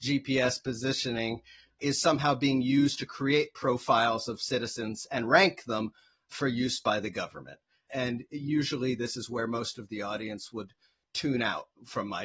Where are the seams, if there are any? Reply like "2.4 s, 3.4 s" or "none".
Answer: 7.9 s